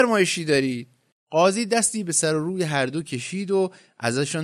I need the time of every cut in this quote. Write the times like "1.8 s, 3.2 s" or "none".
1.1 s